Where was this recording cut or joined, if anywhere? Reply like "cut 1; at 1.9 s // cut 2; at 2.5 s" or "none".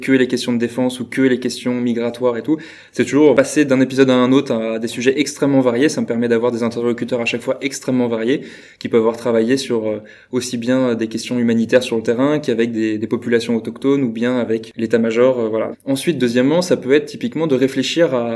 cut 1; at 15.7 s